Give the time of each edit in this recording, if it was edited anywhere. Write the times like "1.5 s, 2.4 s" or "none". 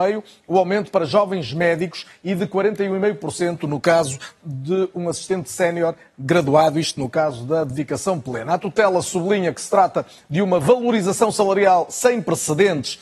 none